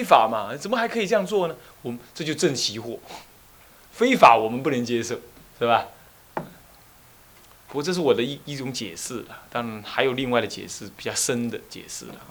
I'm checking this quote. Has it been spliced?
no; 0 cuts

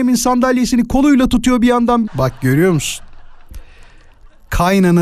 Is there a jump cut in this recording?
yes; 1 cut; at 2.1 s

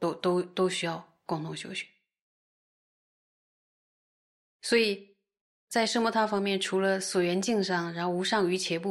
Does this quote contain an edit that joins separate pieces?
no; 0 cuts

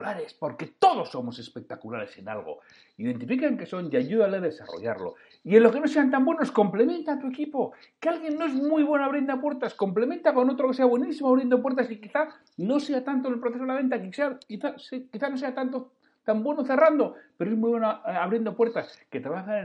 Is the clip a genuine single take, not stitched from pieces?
yes; 0 cuts

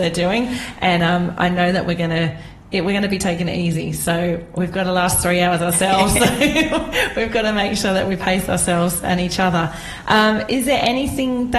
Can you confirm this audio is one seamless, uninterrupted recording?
yes; 0 cuts

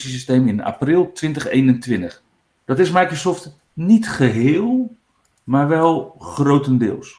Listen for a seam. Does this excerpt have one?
yes; 1 cut; at 2.6 s

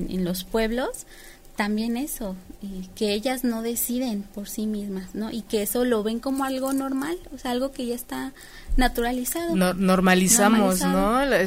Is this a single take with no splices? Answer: yes; 0 cuts

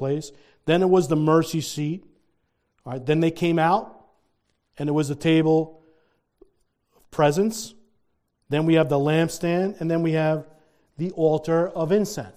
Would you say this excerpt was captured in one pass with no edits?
yes; 0 cuts

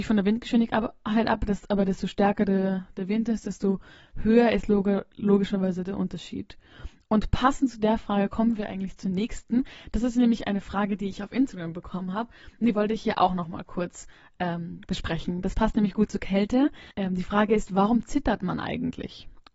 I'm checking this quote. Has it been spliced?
yes; 1 cut; at 16.9 s

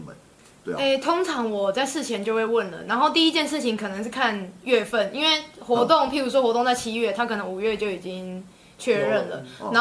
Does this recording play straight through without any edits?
yes; 0 cuts

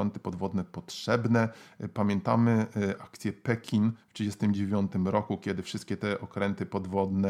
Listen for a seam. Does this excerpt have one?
yes; 1 cut; at 3.0 s

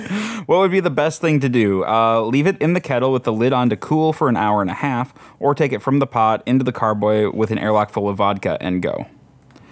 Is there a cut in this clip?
no; 0 cuts

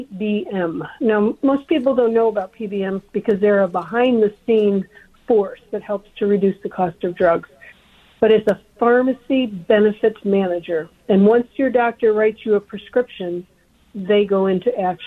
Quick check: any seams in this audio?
no; 0 cuts

